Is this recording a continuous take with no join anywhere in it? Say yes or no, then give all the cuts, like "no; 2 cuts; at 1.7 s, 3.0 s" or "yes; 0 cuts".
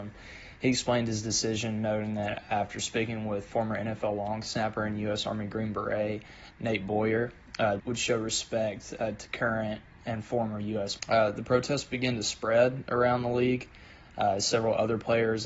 no; 2 cuts; at 7.8 s, 11.0 s